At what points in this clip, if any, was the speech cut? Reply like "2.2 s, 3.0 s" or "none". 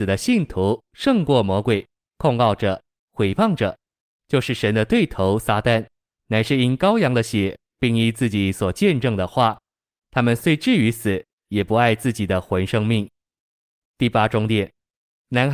none